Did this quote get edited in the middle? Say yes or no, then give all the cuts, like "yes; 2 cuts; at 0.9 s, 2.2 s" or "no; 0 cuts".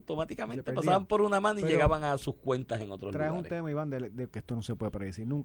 yes; 1 cut; at 4.3 s